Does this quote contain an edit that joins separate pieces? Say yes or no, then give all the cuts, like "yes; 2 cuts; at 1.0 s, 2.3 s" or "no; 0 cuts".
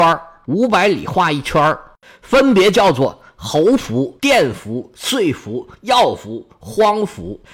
no; 0 cuts